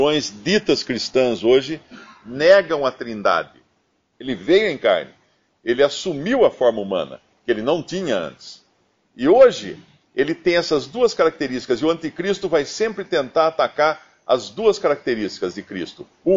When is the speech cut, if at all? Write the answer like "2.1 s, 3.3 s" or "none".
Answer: 4.1 s

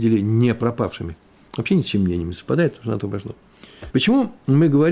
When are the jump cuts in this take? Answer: 1.4 s, 3.9 s

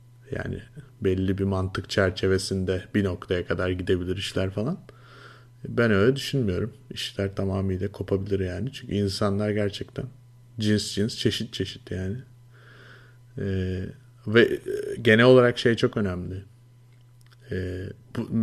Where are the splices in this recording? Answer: none

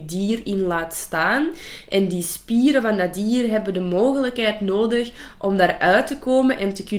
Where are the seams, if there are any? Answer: none

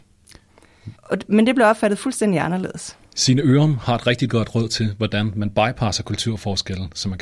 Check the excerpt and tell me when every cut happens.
1.0 s

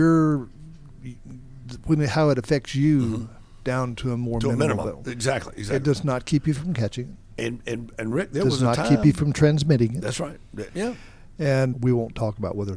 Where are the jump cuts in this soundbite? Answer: 10.7 s, 11.7 s

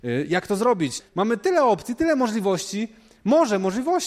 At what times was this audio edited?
1.0 s

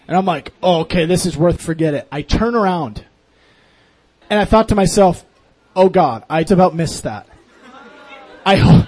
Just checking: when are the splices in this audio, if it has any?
1.6 s, 4.2 s, 6.5 s

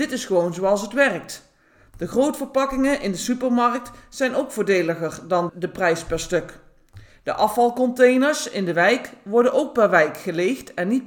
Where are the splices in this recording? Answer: 5.5 s

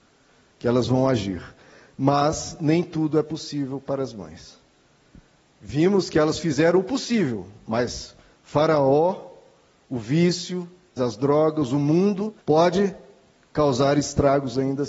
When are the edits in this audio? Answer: 11.0 s, 12.4 s

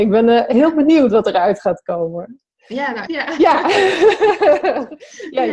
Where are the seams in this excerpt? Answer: 3.1 s

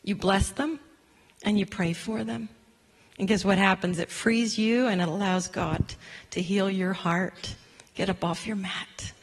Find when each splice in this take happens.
none

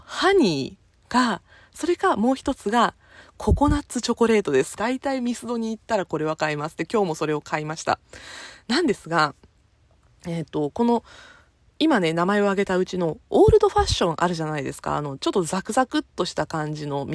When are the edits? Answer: 4.8 s

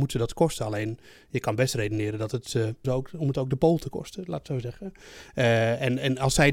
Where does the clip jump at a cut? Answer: 2.8 s

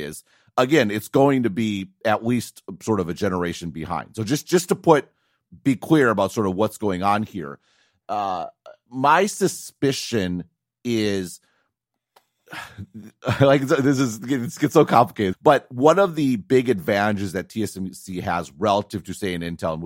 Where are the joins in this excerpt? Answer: 15.3 s

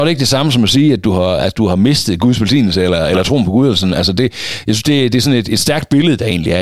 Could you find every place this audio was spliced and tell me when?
none

